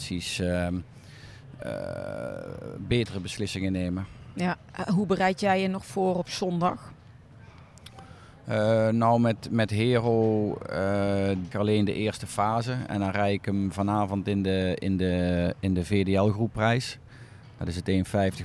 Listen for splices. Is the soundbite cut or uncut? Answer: cut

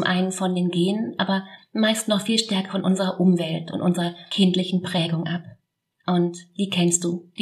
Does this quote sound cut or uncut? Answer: cut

